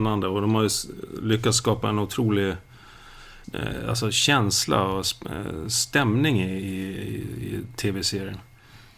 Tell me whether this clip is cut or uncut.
uncut